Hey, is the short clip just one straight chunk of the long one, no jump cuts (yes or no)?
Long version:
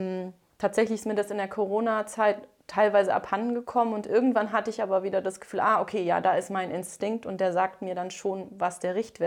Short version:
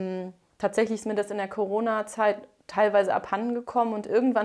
yes